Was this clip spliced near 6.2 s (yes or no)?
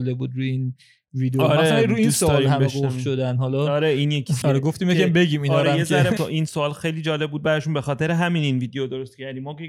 yes